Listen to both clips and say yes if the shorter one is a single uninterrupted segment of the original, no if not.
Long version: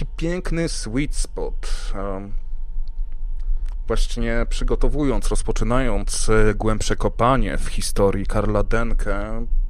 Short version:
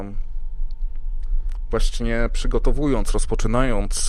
yes